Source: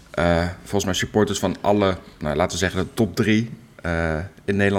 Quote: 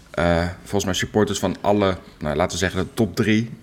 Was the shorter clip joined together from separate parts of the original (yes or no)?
no